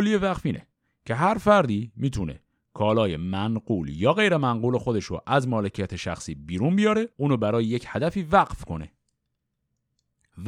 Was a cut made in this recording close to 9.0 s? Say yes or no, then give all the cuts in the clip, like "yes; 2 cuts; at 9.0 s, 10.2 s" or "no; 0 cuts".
no; 1 cut; at 7.1 s